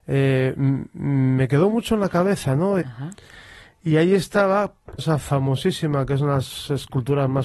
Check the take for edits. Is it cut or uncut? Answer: cut